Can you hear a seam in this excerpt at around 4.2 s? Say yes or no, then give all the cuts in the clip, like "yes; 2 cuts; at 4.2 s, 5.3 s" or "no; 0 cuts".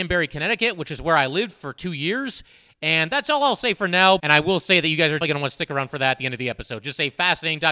yes; 2 cuts; at 4.2 s, 5.2 s